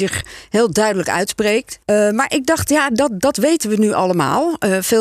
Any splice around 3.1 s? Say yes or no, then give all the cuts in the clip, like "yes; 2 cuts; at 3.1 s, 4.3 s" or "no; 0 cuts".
no; 1 cut; at 1.8 s